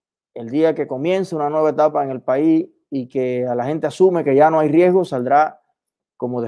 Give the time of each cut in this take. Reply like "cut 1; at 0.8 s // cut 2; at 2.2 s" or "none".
none